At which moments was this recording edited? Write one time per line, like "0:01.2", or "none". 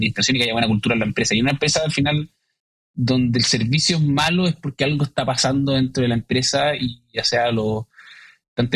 none